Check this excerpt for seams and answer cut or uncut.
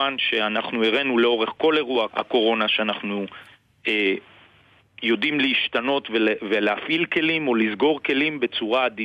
cut